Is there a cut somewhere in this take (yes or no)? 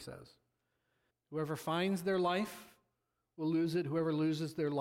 yes